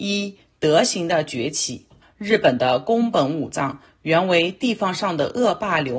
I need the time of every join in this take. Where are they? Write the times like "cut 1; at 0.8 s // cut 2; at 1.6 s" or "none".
cut 1; at 2.0 s